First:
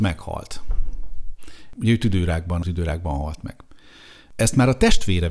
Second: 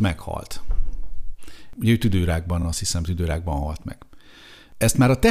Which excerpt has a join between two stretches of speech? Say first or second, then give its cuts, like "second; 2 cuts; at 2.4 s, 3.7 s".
first; 1 cut; at 2.6 s